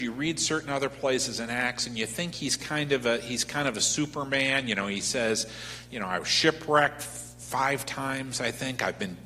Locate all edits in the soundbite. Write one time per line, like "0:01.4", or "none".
none